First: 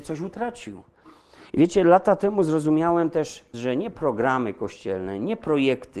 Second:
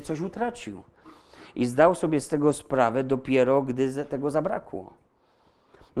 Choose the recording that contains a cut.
first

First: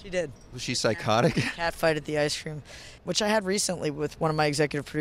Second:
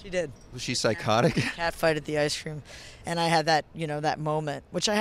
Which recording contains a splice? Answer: first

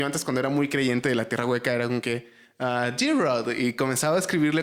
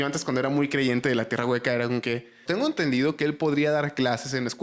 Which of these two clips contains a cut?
second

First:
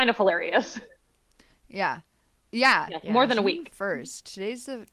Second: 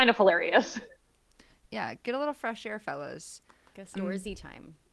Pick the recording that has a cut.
second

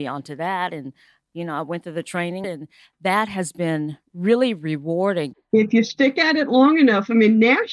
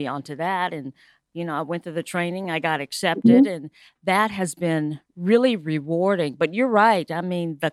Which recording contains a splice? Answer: first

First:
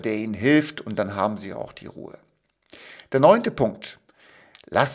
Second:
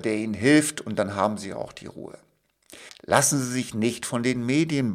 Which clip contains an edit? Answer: second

